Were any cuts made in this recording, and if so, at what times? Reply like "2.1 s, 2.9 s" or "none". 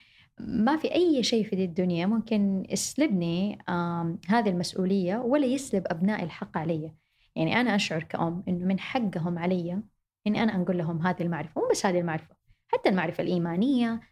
none